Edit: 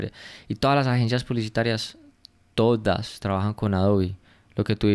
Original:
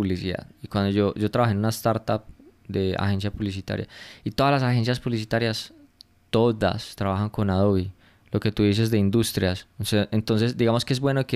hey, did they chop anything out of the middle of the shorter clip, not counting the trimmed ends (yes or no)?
no